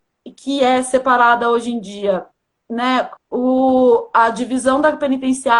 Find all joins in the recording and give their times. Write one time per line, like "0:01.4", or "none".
0:03.2